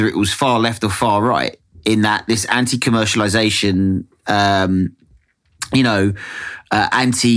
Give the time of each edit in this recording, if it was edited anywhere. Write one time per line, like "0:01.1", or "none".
none

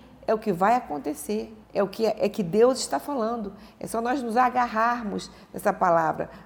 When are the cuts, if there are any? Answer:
0:01.6

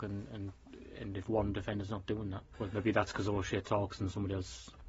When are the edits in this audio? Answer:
0:02.5

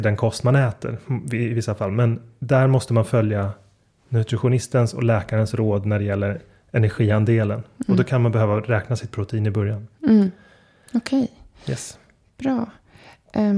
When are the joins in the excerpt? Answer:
none

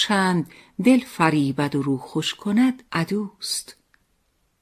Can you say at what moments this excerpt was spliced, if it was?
0:02.9

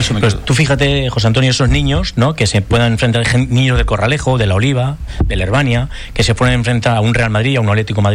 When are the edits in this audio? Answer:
none

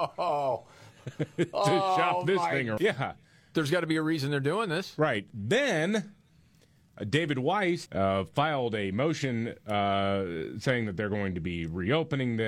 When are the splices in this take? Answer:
0:02.8
0:07.9

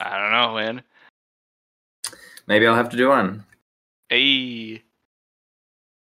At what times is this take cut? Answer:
none

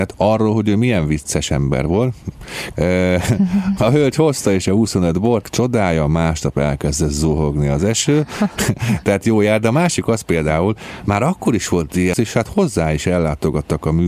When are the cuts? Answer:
0:02.7
0:05.4
0:12.1

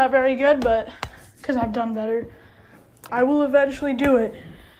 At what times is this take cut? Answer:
0:03.1

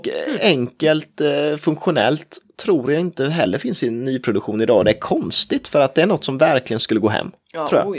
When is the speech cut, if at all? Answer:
none

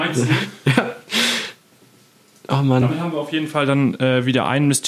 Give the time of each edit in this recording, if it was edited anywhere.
none

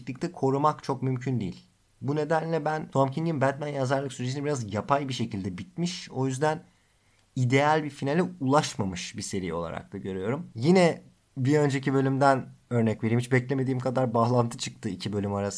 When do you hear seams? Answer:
none

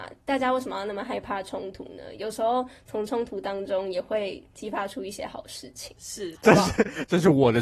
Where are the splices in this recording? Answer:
0:06.3

